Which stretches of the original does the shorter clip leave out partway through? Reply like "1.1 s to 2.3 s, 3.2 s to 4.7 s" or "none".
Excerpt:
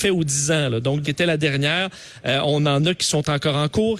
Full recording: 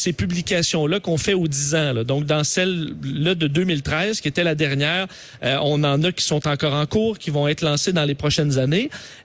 2.3 s to 4.2 s

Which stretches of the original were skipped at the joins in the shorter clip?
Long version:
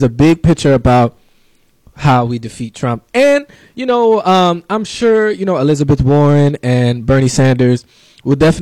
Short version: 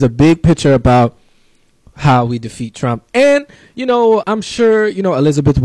4.2 s to 4.7 s

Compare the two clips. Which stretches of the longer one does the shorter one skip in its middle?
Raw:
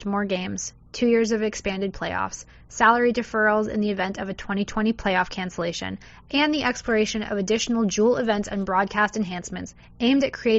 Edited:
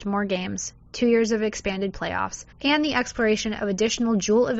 2.5 s to 6.2 s

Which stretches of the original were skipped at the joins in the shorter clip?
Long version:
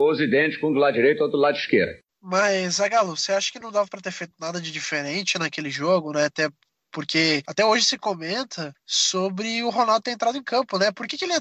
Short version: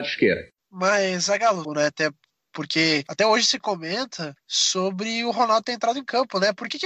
3.2 s to 6.0 s

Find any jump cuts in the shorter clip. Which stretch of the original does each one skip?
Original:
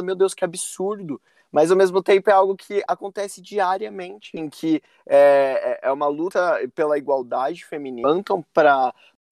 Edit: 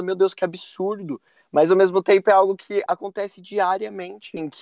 none

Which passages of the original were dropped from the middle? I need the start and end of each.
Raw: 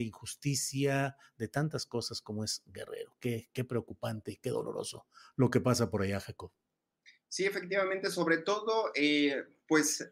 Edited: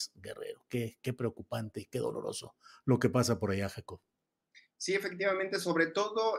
none

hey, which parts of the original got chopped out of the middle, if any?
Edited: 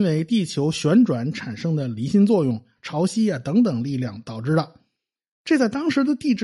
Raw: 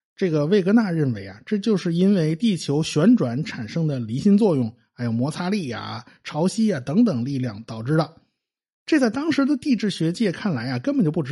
4.9 s to 6.2 s

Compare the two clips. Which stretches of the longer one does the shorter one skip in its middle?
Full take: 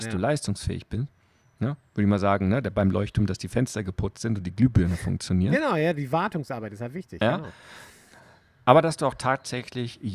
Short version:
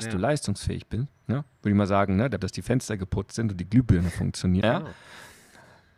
1.2 s to 1.5 s, 2.7 s to 3.3 s, 5.5 s to 7.2 s

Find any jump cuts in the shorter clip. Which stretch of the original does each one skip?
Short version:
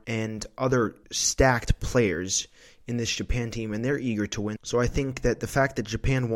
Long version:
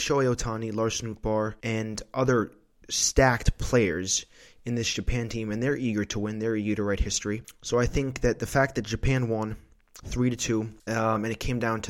2.6 s to 2.8 s, 6.3 s to 7.6 s

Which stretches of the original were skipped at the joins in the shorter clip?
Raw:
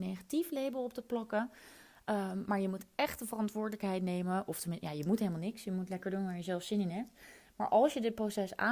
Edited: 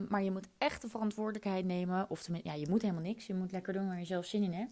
none

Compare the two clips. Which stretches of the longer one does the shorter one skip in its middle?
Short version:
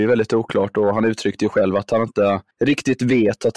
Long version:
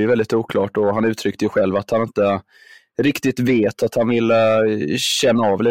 2.5 s to 2.9 s

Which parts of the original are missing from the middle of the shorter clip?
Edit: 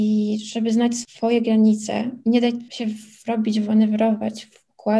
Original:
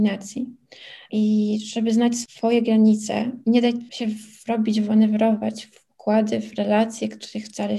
none

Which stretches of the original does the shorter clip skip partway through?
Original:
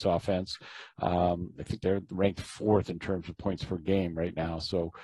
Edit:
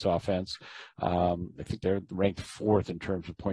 none

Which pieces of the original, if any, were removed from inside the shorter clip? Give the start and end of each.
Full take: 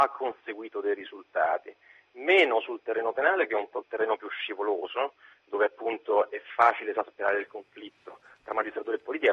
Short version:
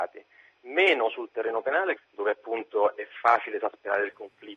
3.5 s to 5.3 s

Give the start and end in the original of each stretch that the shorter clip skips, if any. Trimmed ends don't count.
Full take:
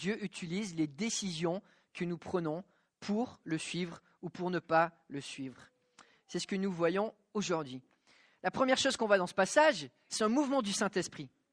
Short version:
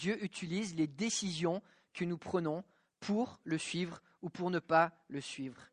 none

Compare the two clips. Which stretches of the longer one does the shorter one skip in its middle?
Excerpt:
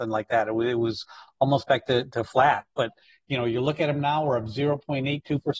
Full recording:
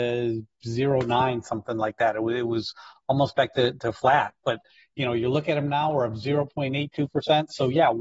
none

